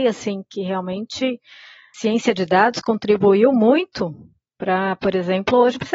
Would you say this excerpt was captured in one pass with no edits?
yes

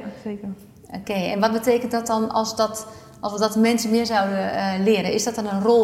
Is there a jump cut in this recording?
no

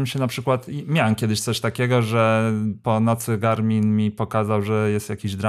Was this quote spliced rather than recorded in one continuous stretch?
no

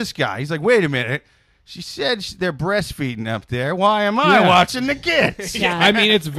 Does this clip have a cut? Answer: no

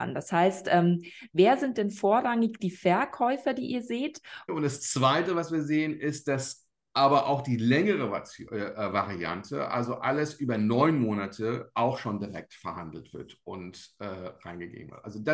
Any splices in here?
yes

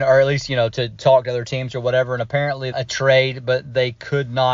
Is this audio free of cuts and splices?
no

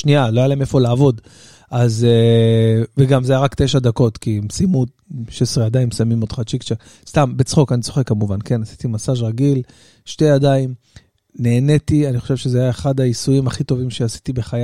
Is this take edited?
no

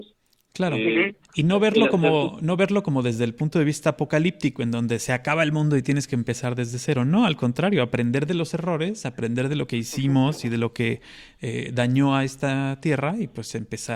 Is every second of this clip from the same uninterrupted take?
yes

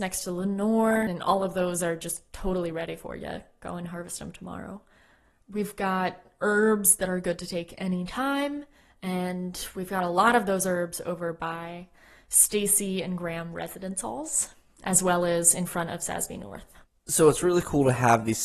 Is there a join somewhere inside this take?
yes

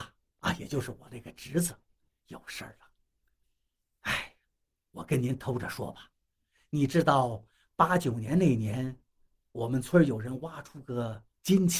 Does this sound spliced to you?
no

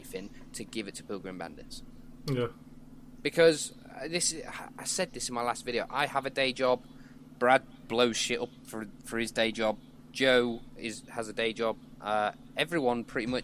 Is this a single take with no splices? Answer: yes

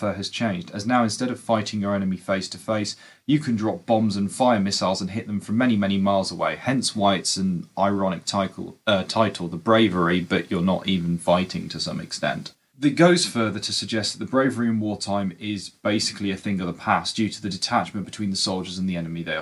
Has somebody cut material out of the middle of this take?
no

